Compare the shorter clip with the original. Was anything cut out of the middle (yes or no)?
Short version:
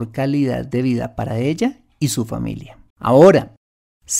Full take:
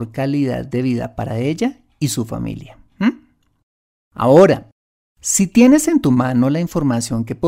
yes